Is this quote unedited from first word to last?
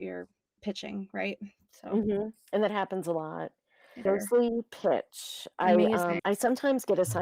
no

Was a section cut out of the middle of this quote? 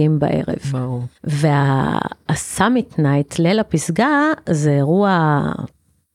yes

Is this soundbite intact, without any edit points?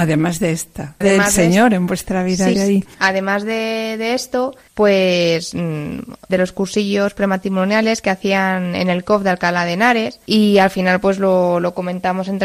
no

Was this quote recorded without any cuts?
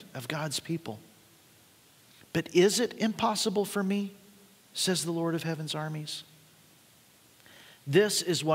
yes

